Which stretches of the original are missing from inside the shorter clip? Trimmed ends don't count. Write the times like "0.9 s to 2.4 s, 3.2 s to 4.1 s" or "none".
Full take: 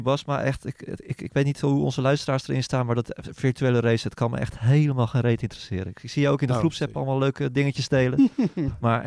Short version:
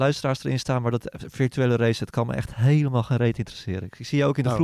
none

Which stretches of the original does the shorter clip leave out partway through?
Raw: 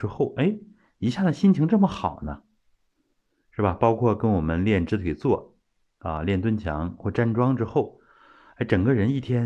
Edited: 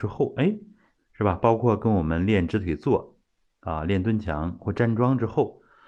1.0 s to 3.3 s

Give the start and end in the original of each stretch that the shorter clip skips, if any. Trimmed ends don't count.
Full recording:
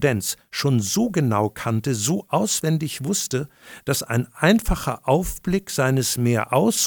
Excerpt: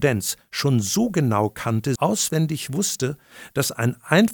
2.0 s to 2.3 s

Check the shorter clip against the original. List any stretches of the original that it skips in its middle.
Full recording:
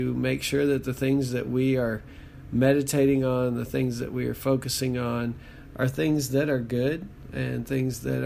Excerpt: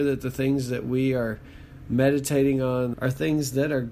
3.6 s to 5.7 s

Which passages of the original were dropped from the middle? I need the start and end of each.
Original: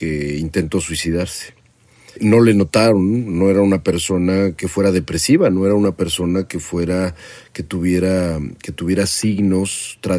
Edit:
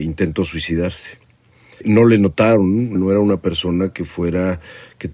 3.3 s to 5.5 s

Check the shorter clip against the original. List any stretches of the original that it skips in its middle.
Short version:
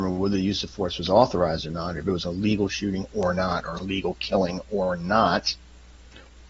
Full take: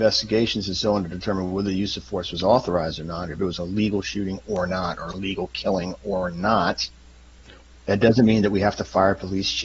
none

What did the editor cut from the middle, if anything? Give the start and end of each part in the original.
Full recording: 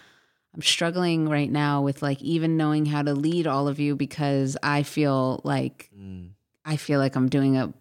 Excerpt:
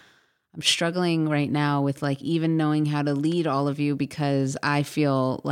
none

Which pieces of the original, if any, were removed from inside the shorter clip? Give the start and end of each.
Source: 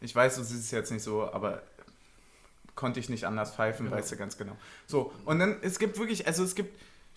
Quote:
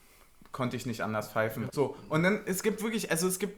3.9 s to 4.8 s

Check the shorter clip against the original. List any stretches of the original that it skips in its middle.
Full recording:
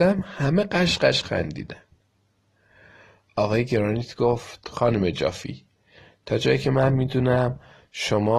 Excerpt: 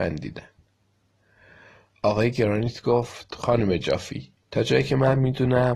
5.8 s to 6.2 s

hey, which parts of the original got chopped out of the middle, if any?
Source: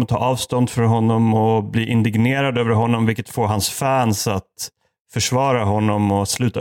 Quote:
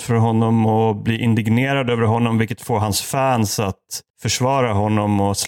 4.8 s to 5.0 s

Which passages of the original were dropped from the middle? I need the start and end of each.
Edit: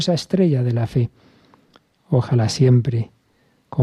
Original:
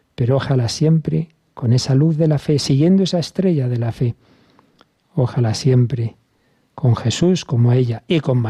none

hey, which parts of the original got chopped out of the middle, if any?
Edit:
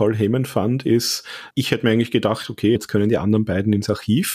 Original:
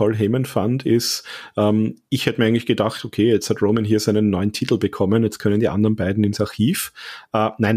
1.5 s to 2.1 s, 3.3 s to 5.3 s

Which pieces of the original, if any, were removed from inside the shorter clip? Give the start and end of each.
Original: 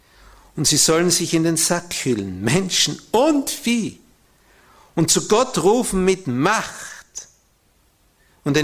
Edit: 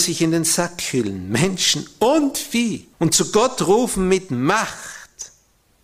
4.1 s to 4.9 s

